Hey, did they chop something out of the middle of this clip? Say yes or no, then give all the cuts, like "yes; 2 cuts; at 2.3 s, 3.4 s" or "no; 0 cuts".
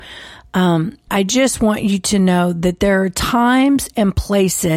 yes; 1 cut; at 1.1 s